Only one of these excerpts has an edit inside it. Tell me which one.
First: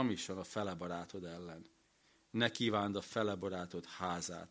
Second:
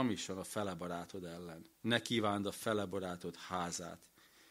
second; 1 cut; at 1.7 s

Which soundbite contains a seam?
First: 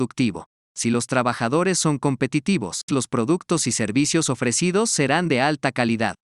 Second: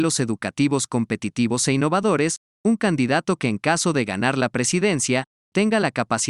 first; 1 cut; at 2.9 s

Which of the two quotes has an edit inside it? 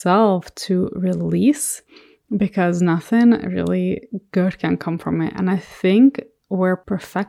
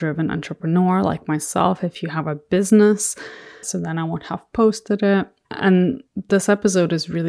second; 2 cuts; at 3.6 s, 5.4 s

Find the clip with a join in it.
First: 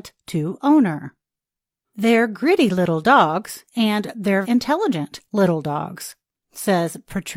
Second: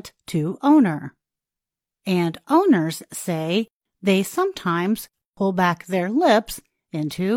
first; 2 cuts; at 1.8 s, 4.4 s

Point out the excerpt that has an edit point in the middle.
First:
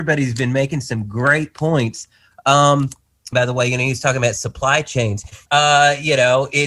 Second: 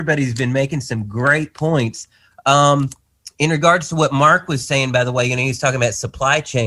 first; 2 cuts; at 3.3 s, 5.5 s

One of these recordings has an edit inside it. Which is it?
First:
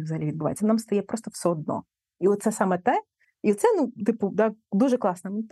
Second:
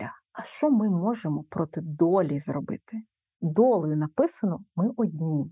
first; 1 cut; at 3.2 s

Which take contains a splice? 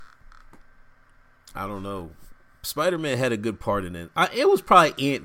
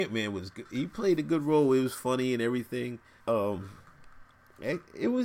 second; 1 cut; at 3.2 s

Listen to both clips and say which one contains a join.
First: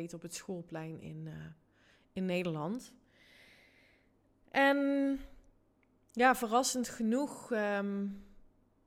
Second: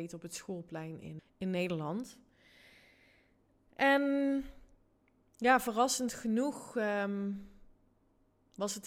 second; 1 cut; at 1.2 s

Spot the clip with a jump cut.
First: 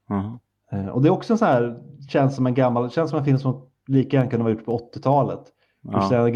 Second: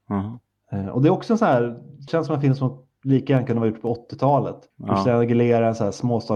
second; 2 cuts; at 2.1 s, 4.7 s

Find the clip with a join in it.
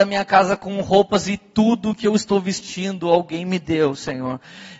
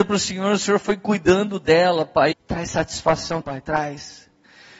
second; 2 cuts; at 2.3 s, 3.4 s

